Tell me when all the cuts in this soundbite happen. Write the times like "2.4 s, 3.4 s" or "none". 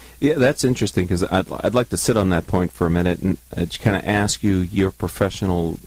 3.5 s